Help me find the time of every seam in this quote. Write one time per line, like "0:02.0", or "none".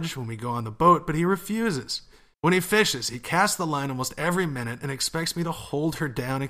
0:02.3

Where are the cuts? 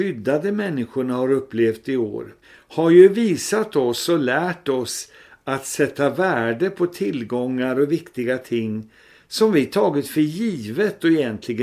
0:02.4

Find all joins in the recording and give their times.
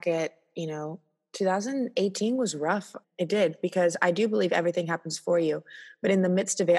0:03.0

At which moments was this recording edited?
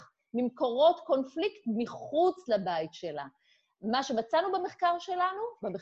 none

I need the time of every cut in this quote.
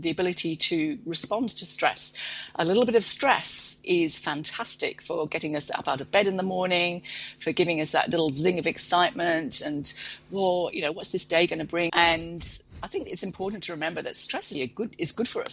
0:11.9
0:14.5

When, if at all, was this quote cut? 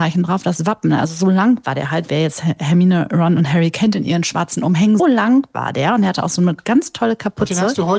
0:05.0

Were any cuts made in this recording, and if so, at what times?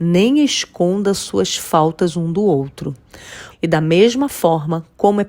0:03.5

